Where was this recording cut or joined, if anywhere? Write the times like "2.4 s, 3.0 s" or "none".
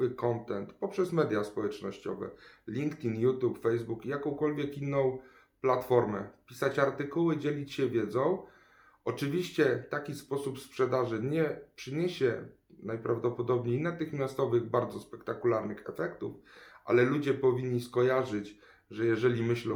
none